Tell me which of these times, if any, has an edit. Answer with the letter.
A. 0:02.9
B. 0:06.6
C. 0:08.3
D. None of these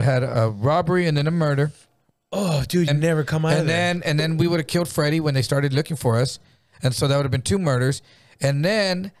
A